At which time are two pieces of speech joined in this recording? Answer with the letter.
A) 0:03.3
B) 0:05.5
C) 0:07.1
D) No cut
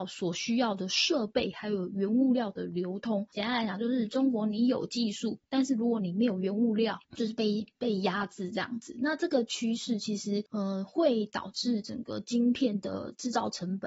C